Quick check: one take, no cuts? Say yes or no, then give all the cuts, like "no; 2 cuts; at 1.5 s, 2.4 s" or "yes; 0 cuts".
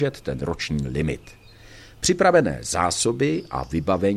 yes; 0 cuts